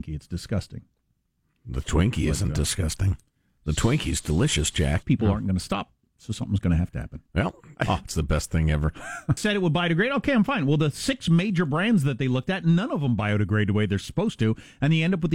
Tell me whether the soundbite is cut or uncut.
cut